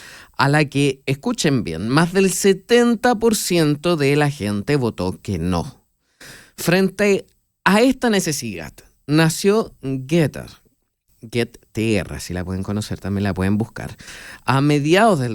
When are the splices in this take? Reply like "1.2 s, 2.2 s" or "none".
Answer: none